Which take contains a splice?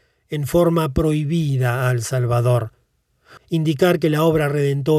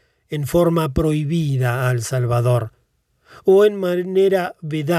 first; 1 cut; at 3.4 s

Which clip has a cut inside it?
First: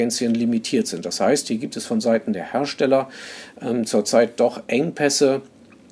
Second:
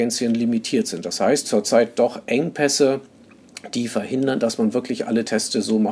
second; 1 cut; at 1.4 s

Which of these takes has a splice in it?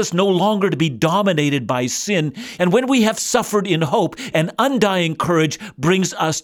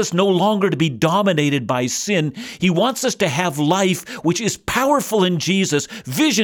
first; 2 cuts; at 2.6 s, 4.3 s

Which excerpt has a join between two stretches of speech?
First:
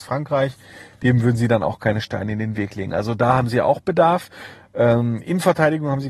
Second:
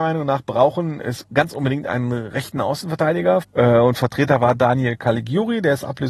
second; 1 cut; at 3.4 s

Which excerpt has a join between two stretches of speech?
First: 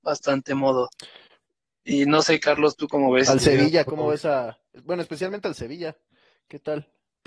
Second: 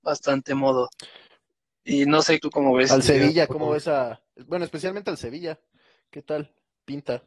second; 1 cut; at 2.4 s

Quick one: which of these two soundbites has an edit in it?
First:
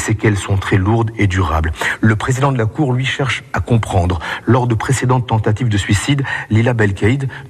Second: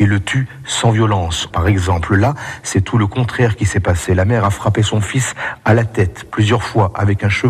second; 1 cut; at 1.5 s

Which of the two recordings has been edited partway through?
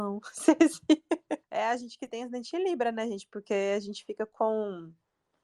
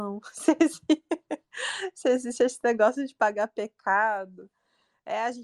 first; 1 cut; at 1.4 s

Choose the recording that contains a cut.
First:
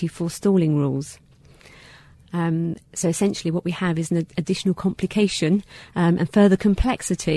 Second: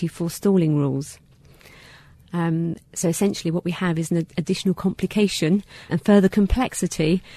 second; 1 cut; at 5.9 s

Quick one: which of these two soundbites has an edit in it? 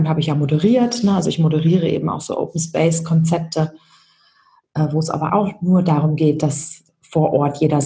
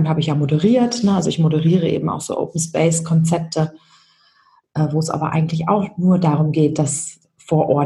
first; 1 cut; at 5.3 s

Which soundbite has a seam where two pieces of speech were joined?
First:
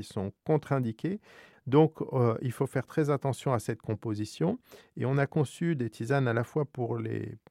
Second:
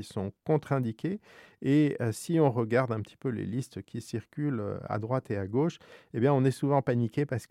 first; 1 cut; at 1.5 s

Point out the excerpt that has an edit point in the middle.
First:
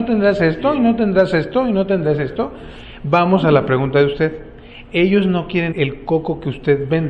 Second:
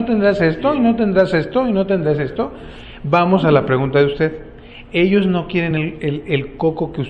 first; 1 cut; at 5.7 s

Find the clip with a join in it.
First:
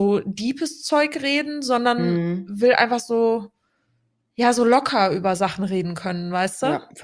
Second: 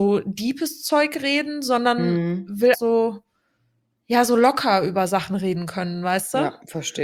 second; 1 cut; at 2.7 s

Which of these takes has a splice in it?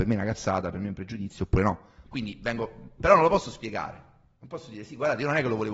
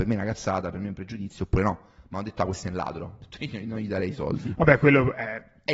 first; 1 cut; at 2.1 s

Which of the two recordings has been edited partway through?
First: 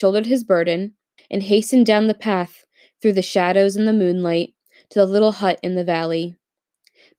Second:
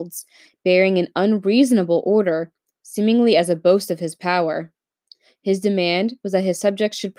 first; 1 cut; at 1.2 s

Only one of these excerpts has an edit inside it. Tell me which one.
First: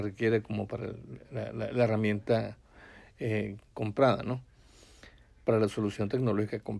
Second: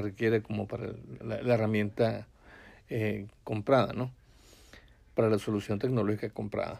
second; 1 cut; at 1.2 s

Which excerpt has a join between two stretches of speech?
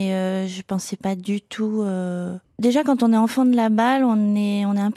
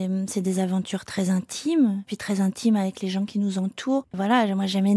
second; 1 cut; at 2.1 s

